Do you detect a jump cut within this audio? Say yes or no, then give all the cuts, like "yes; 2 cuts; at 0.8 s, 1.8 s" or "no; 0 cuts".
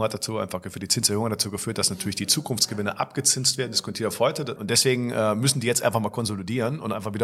yes; 1 cut; at 4.6 s